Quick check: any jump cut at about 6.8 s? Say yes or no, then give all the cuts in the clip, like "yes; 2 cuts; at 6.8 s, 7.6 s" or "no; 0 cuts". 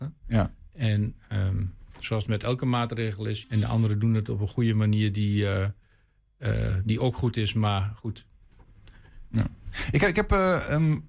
no; 1 cut; at 3.4 s